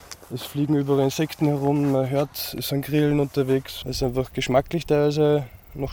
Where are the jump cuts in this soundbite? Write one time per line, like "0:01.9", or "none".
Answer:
0:03.8